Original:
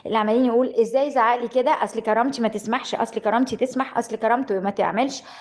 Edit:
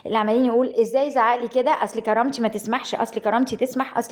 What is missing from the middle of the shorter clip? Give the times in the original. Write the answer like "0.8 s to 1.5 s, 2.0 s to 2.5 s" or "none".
none